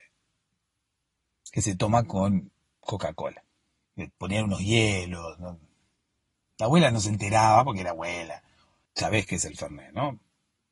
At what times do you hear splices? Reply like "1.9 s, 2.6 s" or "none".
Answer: 3.8 s, 8.9 s

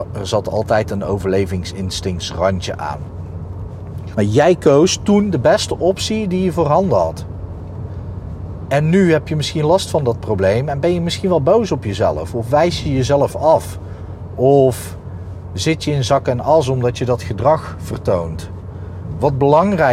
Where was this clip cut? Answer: 4.1 s

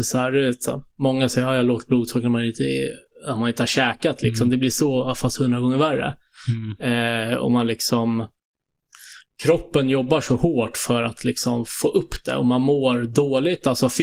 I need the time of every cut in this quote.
none

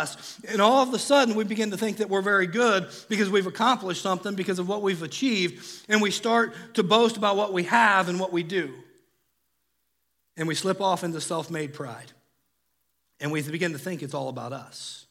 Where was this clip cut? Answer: none

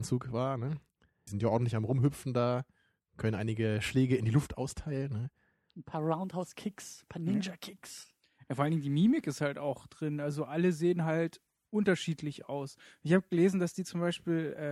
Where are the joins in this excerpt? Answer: 1.3 s

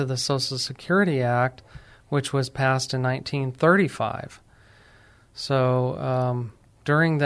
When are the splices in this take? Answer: none

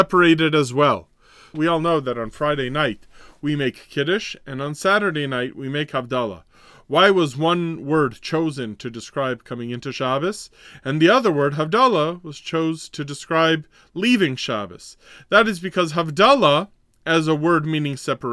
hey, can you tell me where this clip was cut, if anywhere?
1.5 s

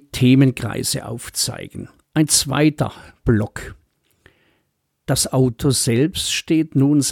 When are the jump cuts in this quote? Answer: 2.0 s

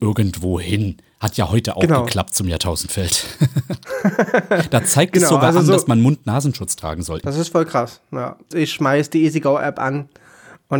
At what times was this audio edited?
7.2 s, 8.5 s

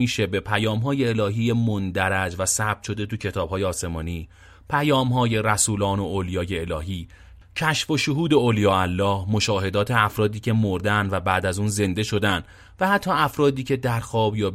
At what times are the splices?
none

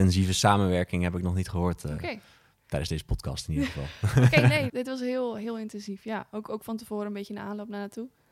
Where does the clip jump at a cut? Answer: 4.7 s

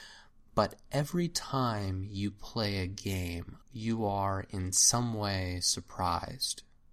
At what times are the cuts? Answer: 3.6 s

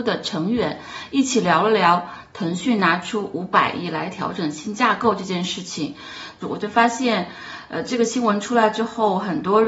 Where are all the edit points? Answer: 6.4 s

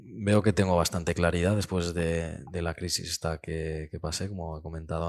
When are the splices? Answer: none

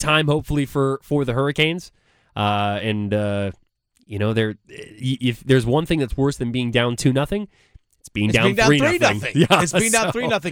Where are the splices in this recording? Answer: none

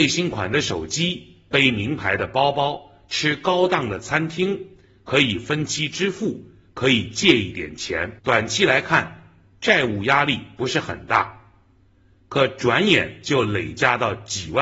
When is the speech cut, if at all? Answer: 8.2 s

